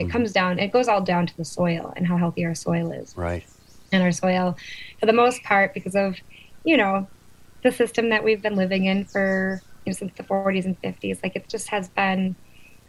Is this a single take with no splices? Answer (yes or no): yes